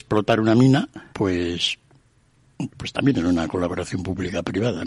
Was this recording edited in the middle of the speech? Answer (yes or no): yes